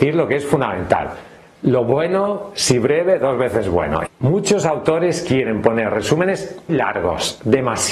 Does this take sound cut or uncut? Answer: cut